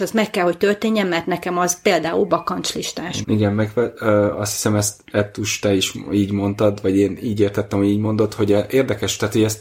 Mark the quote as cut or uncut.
cut